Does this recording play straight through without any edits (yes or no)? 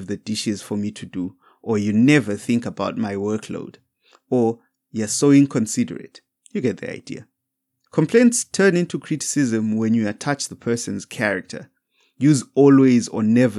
yes